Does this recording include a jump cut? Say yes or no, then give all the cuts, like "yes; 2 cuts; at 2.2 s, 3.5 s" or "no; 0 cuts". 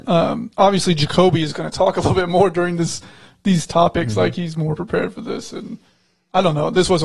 no; 0 cuts